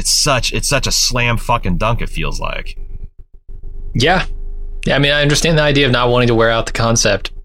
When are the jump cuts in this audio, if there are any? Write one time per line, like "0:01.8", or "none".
none